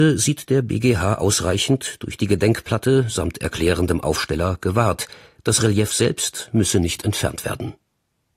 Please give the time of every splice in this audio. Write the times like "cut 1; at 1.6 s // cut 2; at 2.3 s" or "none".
none